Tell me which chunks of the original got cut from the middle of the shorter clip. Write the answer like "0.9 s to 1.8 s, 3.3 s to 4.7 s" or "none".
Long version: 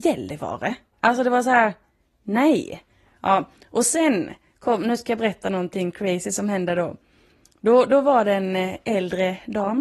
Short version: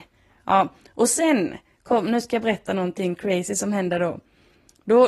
none